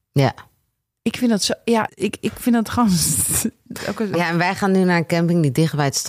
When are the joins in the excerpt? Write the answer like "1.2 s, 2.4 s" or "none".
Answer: 1.9 s, 4.1 s

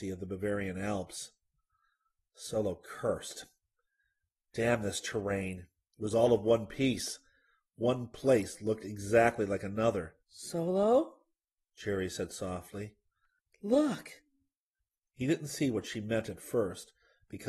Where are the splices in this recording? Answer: 10.2 s

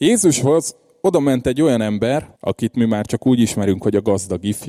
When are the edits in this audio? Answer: 2.3 s

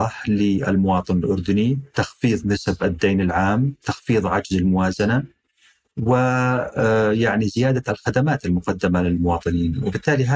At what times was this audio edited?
none

